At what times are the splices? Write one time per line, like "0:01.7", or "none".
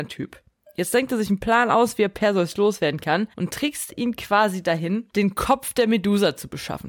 0:03.3
0:05.1